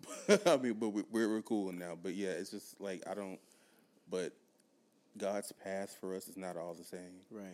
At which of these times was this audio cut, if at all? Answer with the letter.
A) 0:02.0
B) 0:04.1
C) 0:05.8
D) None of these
B